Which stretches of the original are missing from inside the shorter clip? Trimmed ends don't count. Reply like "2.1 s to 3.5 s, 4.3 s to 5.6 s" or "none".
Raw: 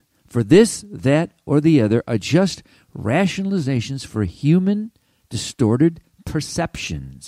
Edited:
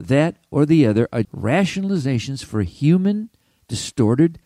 2.2 s to 2.9 s